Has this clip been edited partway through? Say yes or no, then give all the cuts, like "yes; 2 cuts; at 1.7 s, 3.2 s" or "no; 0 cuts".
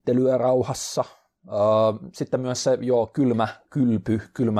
no; 0 cuts